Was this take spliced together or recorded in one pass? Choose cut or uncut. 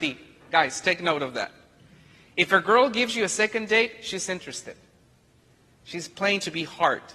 uncut